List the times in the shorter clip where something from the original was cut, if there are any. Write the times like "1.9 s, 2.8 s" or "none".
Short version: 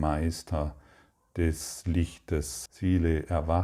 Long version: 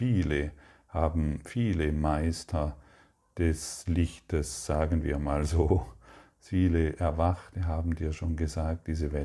2.7 s

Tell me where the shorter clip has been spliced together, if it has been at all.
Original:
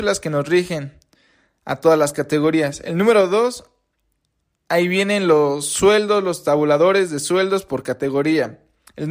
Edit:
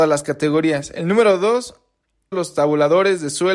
2.3 s

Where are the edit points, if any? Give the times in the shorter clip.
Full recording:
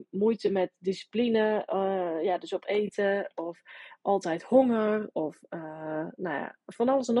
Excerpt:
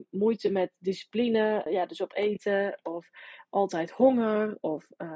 1.7 s

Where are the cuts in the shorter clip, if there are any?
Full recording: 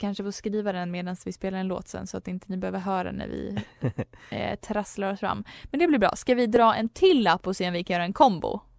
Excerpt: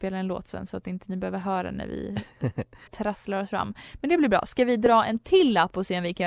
2.9 s

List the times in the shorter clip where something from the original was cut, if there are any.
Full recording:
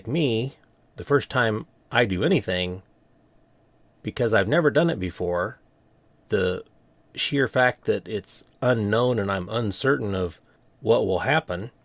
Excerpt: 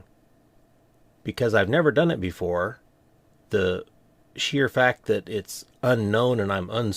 none

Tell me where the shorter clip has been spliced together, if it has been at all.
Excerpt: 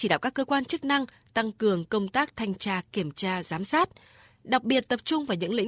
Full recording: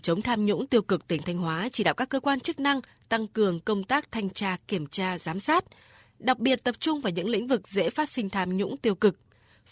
none

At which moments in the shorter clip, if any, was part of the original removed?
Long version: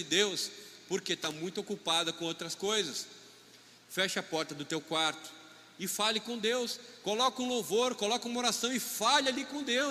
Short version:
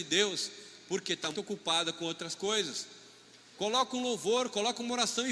1.3 s, 3.5 s

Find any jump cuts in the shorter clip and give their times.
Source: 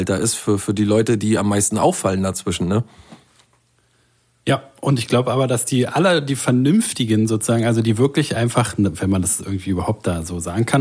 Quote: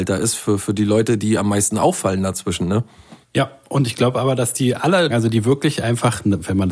3.2 s, 5.1 s

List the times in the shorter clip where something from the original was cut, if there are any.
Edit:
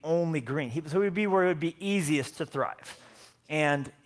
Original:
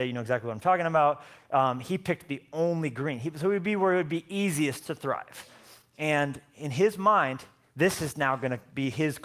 none

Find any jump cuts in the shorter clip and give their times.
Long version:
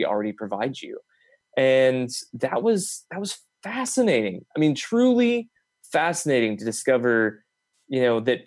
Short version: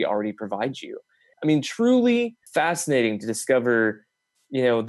1.3 s, 2.5 s

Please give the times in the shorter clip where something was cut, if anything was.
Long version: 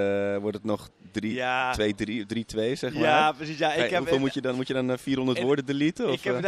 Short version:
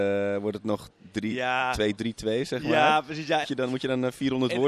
2.0 s, 3.4 s

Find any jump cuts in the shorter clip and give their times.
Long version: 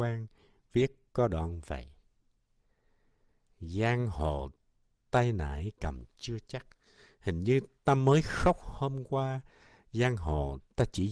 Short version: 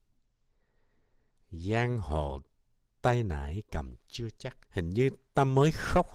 4.6 s

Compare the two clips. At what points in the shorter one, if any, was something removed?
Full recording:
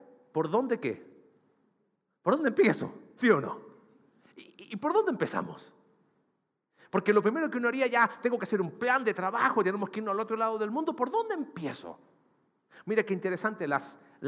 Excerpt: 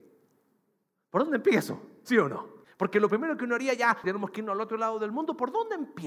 2.6 s, 4.0 s

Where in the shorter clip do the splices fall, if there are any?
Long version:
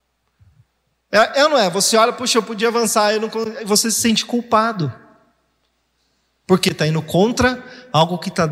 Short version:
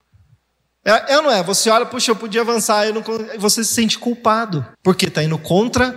4.7 s

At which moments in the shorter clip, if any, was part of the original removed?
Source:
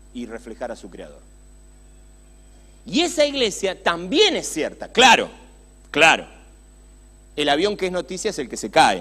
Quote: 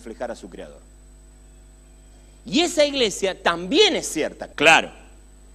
4.5 s

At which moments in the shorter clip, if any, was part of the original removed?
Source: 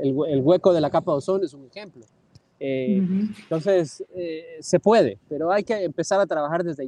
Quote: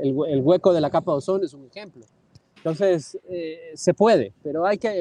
2.6 s

